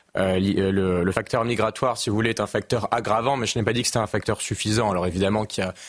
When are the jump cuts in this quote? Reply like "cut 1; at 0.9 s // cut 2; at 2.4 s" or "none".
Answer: none